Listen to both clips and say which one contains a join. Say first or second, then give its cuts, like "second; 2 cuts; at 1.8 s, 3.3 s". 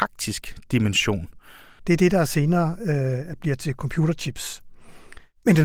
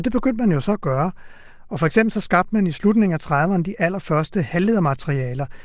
first; 1 cut; at 1.8 s